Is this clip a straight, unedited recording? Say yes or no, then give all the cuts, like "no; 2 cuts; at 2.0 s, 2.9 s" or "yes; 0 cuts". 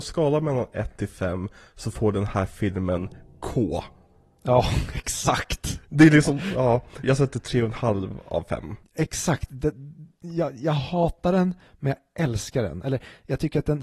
no; 2 cuts; at 7.0 s, 8.8 s